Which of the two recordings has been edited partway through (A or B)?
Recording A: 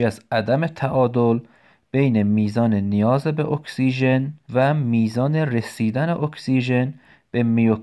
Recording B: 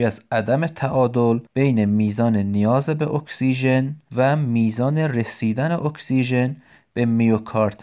B